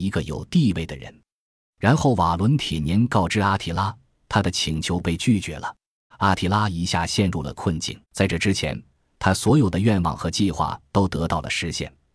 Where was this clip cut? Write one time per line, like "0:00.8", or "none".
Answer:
0:06.1
0:08.0